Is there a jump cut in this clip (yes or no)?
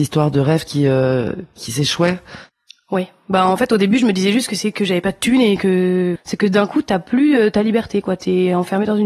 yes